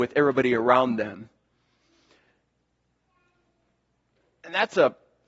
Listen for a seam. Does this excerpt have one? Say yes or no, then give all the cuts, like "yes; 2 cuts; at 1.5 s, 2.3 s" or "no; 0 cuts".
no; 0 cuts